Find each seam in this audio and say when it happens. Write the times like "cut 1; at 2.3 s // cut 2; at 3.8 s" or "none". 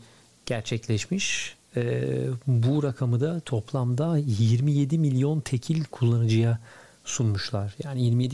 none